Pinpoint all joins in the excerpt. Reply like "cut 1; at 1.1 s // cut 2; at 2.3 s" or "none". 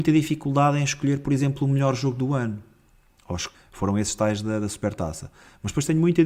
cut 1; at 3.5 s